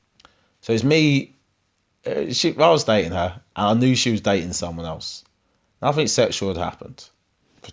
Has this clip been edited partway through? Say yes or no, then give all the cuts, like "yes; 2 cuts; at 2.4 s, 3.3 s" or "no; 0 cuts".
no; 0 cuts